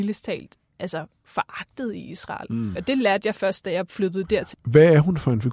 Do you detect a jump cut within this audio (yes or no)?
yes